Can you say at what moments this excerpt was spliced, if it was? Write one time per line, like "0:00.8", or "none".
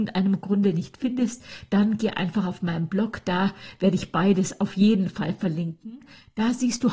none